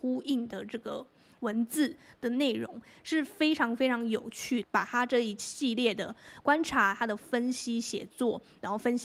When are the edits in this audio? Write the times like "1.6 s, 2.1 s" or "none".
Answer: 4.6 s